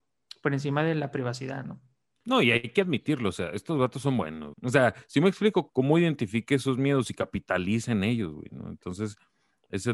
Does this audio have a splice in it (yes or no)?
yes